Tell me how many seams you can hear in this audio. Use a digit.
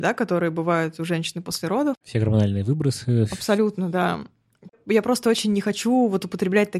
1